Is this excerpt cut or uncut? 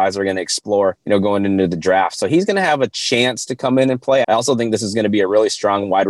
cut